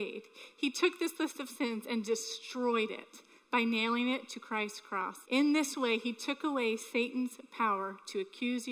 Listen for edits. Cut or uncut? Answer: cut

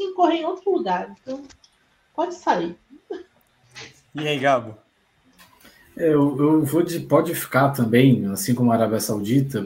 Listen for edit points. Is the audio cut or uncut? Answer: uncut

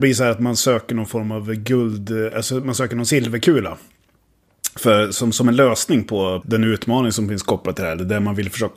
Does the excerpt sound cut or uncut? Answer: cut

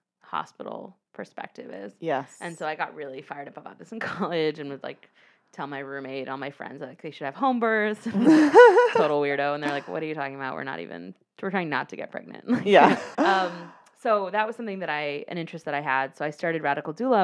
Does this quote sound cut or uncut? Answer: cut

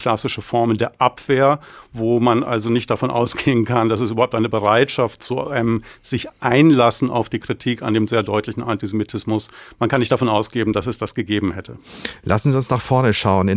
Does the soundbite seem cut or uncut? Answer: uncut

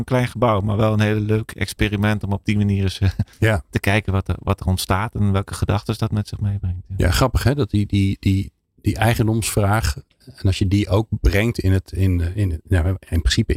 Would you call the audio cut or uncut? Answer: cut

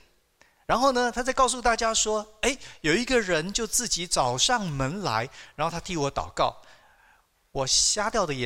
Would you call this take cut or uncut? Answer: uncut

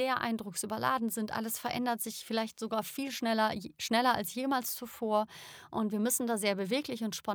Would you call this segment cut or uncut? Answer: uncut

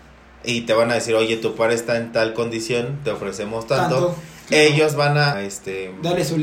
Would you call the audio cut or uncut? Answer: cut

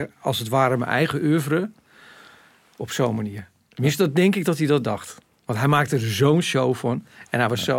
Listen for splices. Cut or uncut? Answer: uncut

